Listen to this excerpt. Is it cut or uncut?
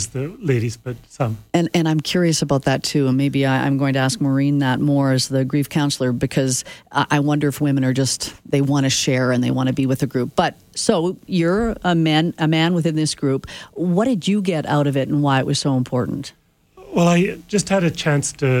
uncut